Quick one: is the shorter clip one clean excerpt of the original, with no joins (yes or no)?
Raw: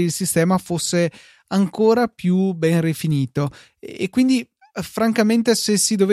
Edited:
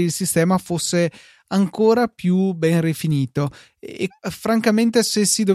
no